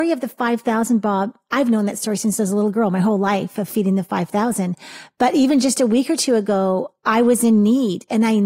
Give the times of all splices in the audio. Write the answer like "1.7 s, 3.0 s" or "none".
none